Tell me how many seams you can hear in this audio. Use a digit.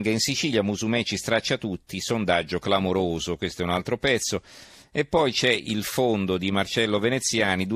0